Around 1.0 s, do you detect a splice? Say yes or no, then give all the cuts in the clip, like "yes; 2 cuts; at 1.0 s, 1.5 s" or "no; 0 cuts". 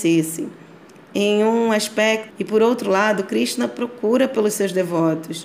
no; 1 cut; at 2.3 s